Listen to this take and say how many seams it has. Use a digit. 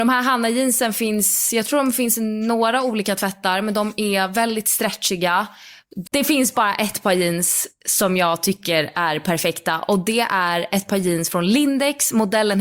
1